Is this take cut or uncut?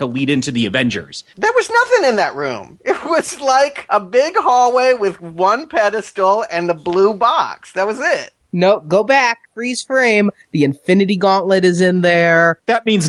cut